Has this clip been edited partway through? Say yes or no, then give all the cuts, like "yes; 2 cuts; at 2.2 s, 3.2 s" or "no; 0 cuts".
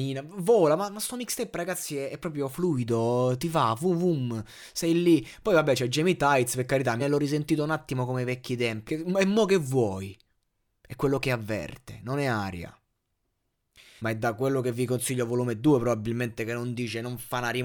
yes; 3 cuts; at 7.0 s, 8.9 s, 14.0 s